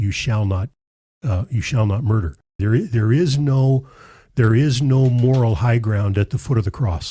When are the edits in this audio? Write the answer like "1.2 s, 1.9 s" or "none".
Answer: 2.6 s